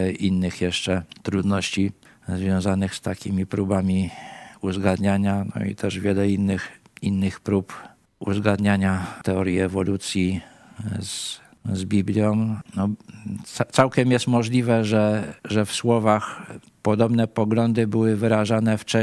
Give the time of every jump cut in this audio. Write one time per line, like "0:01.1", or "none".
0:12.7
0:15.4